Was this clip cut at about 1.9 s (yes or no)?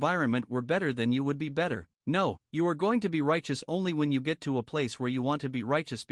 yes